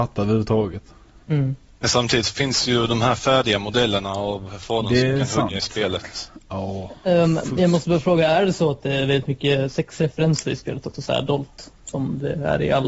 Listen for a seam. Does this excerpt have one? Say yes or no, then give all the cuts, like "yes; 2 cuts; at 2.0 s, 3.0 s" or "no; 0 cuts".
no; 0 cuts